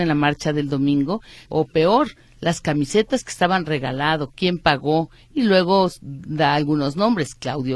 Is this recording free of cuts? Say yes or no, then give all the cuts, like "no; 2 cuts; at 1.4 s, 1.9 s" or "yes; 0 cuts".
no; 1 cut; at 1.5 s